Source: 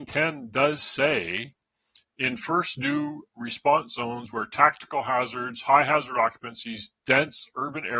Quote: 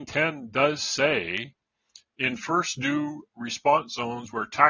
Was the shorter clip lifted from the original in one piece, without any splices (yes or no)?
yes